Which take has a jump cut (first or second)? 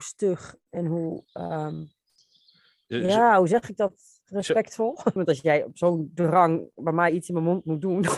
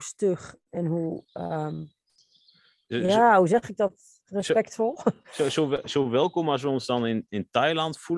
first